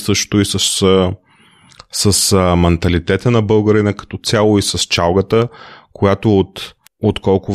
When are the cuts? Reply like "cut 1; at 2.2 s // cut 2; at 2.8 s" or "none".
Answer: none